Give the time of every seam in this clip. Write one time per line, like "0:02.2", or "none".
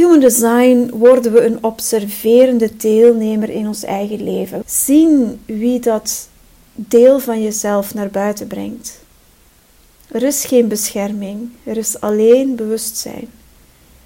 0:04.6